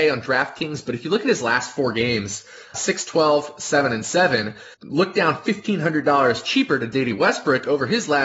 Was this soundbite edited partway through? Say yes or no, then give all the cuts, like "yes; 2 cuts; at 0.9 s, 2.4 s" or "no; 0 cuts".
yes; 2 cuts; at 2.7 s, 4.7 s